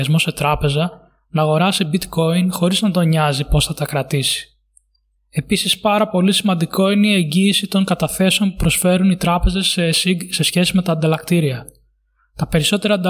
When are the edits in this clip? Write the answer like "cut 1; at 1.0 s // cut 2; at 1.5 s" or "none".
cut 1; at 5.1 s